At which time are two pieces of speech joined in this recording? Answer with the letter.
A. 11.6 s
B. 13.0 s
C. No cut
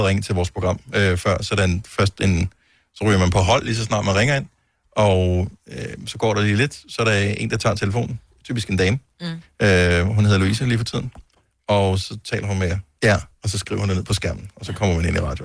B